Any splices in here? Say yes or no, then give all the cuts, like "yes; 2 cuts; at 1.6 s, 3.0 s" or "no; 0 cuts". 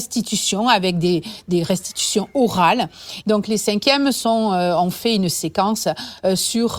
yes; 1 cut; at 3.2 s